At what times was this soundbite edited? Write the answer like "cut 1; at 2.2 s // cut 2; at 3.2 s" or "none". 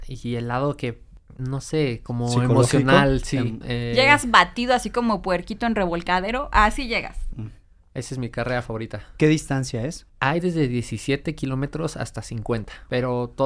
cut 1; at 3.6 s // cut 2; at 7.3 s